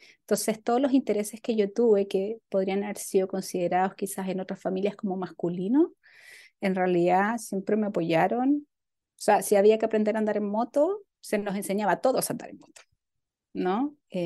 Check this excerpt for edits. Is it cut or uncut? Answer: uncut